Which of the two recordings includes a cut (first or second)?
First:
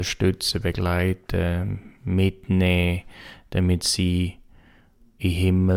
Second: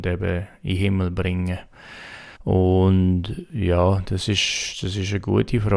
second